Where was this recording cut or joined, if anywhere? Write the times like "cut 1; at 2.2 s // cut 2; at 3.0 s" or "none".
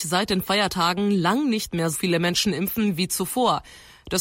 cut 1; at 1.9 s